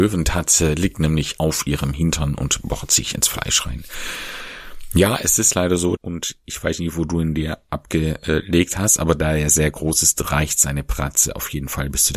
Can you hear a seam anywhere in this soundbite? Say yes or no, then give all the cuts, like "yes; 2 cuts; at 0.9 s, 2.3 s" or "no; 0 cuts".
yes; 1 cut; at 6.0 s